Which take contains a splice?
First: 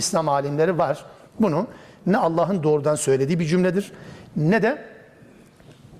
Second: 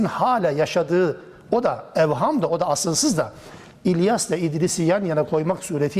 first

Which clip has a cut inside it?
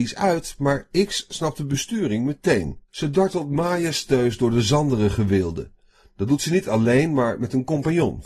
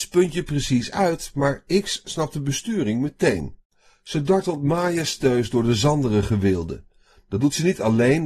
first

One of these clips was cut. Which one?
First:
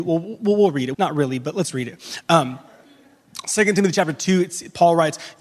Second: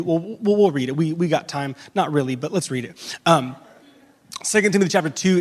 first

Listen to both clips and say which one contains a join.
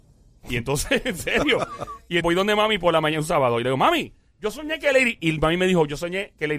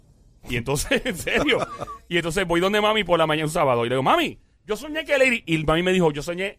first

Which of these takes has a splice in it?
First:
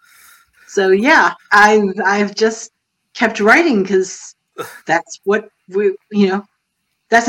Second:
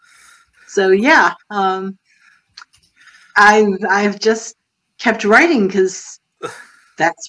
first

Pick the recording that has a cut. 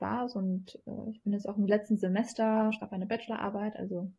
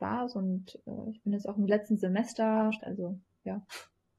second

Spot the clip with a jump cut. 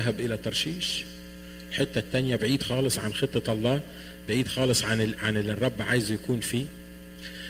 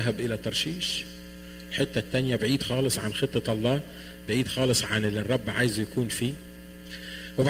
second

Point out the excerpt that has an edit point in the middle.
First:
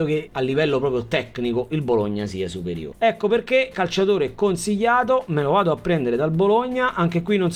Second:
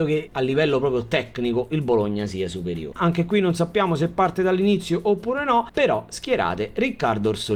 second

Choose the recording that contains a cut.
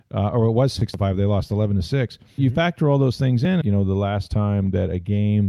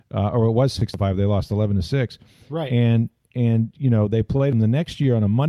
first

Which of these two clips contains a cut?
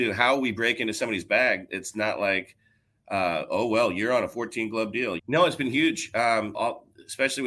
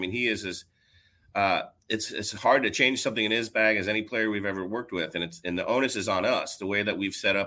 first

